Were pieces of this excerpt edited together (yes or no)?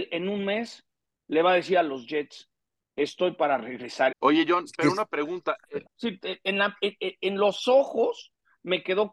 yes